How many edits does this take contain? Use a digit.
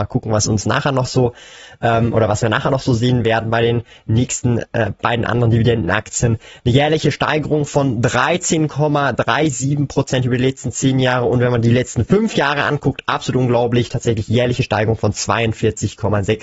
0